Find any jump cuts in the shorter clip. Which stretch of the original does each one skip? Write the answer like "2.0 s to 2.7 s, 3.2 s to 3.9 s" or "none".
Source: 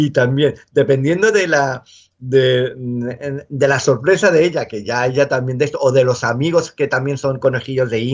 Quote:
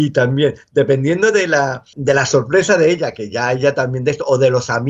1.9 s to 3.5 s